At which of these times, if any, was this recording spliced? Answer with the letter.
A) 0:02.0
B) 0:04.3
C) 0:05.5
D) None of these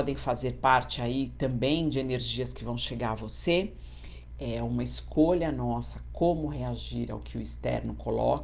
B